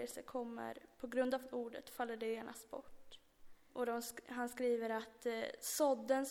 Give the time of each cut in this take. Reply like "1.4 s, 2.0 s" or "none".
3.7 s